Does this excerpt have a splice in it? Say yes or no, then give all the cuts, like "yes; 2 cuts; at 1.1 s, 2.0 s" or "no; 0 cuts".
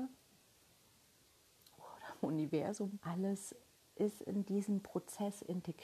yes; 1 cut; at 3.0 s